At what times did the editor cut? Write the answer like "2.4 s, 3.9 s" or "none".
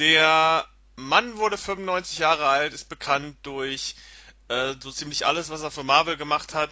none